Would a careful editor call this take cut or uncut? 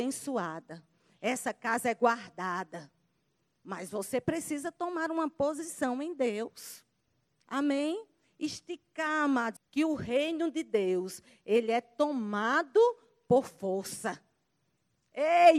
cut